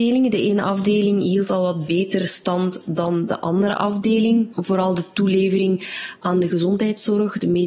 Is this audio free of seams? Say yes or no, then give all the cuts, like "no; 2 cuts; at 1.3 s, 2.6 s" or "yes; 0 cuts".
yes; 0 cuts